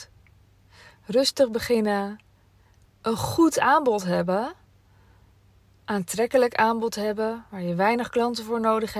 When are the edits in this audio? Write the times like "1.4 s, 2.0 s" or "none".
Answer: 2.9 s

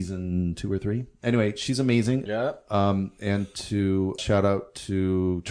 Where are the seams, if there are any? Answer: 2.3 s, 4.2 s

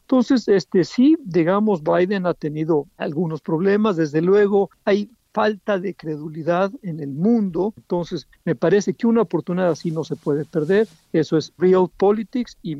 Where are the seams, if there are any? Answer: 7.8 s, 11.6 s

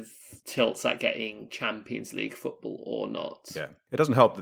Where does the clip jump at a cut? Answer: none

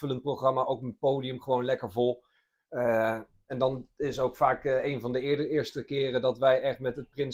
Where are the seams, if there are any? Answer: none

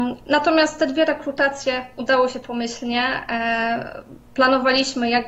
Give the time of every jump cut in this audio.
none

